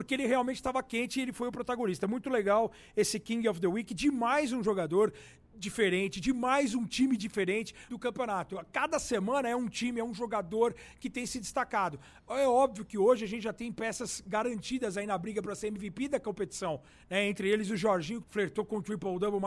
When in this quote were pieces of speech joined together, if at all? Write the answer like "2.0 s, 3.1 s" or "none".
7.9 s, 18.2 s